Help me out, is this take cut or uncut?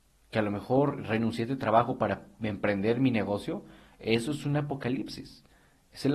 uncut